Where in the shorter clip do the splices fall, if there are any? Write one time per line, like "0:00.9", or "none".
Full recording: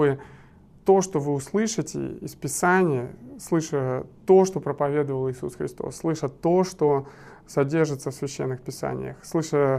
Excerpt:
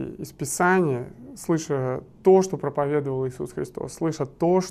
none